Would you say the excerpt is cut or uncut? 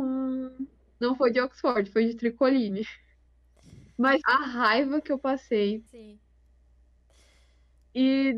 cut